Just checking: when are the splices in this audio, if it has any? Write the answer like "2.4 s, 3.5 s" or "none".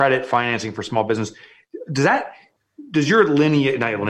none